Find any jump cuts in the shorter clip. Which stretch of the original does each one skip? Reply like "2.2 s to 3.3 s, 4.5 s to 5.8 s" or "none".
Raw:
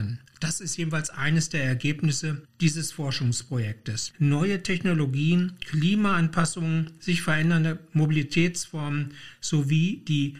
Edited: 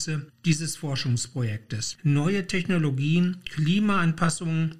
none